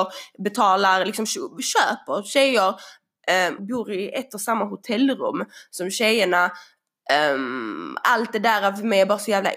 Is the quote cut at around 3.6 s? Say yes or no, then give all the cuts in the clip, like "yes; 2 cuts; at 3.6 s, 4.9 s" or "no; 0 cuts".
yes; 1 cut; at 3.6 s